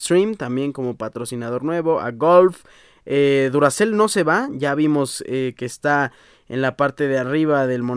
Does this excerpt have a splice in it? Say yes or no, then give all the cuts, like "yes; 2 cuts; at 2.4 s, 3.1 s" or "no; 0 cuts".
no; 0 cuts